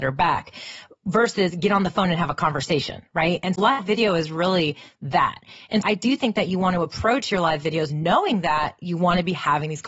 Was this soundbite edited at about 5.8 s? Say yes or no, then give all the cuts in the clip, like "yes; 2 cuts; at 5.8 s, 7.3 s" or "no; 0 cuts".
yes; 2 cuts; at 3.5 s, 5.8 s